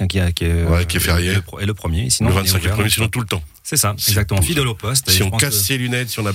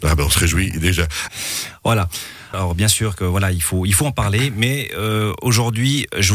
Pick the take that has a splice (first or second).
second